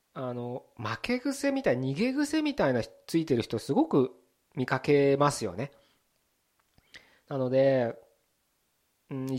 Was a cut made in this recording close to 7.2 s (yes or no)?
yes